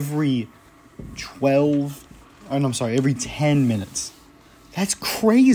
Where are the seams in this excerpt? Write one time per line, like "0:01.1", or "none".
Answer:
none